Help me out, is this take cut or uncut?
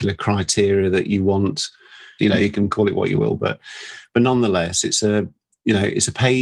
cut